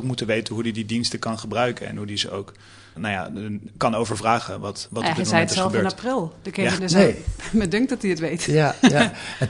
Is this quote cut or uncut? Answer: cut